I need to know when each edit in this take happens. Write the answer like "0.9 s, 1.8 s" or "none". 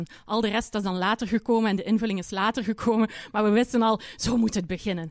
none